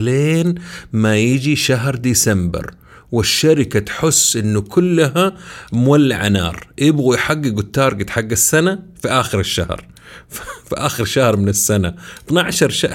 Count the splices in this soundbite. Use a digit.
0